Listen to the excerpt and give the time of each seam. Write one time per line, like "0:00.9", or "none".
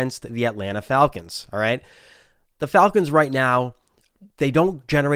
none